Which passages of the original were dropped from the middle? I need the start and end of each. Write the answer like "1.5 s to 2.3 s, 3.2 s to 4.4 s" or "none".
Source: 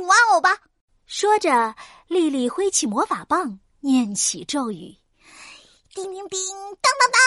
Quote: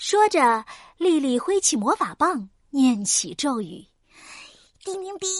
none